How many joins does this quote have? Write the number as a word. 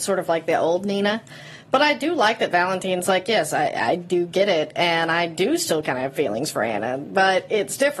zero